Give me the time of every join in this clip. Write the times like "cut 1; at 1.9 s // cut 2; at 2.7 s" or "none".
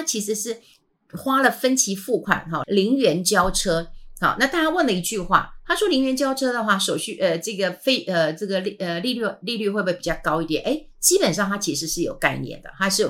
cut 1; at 2.6 s